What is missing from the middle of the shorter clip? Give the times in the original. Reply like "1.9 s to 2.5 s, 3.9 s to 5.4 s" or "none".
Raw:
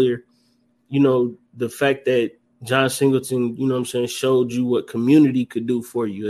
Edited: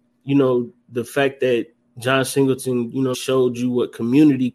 3.8 s to 4.1 s